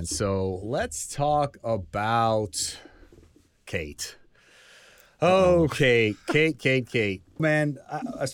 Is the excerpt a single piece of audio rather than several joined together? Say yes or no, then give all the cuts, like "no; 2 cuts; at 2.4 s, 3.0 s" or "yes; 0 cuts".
no; 1 cut; at 7.4 s